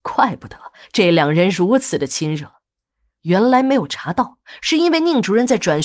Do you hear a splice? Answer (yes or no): no